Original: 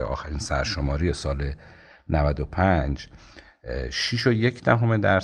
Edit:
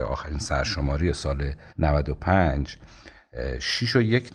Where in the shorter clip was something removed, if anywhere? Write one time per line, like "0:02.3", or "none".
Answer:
0:01.7